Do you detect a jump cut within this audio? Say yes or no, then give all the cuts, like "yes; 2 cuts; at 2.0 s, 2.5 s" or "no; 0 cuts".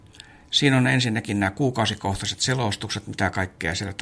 no; 0 cuts